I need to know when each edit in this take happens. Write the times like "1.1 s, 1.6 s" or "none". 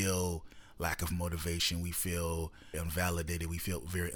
2.7 s